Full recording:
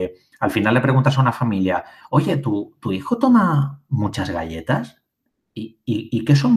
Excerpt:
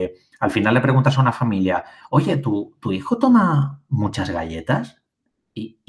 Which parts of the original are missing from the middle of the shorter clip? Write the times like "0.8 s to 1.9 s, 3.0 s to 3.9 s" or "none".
none

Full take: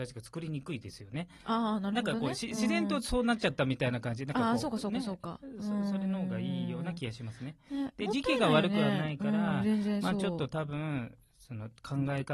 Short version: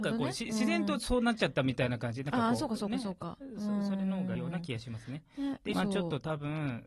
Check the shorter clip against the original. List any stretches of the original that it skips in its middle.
6.4 s to 6.7 s, 8.1 s to 10.0 s

